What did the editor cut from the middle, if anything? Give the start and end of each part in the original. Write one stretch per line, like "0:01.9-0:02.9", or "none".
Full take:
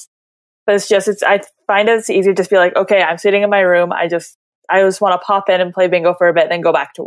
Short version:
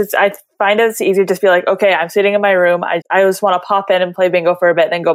0:04.1-0:04.6